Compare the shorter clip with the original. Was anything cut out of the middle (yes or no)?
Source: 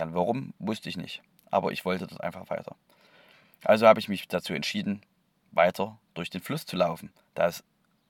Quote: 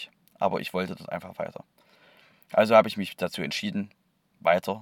no